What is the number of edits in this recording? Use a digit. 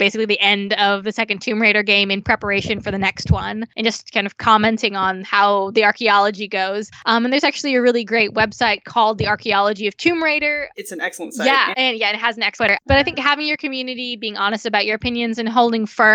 2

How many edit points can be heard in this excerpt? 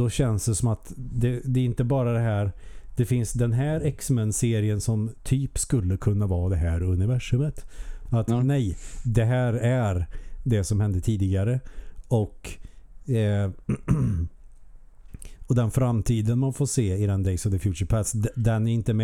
1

